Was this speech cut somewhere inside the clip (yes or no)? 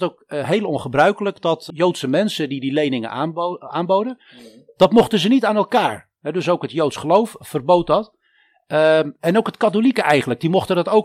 yes